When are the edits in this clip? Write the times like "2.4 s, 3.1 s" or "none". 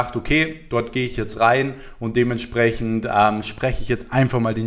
none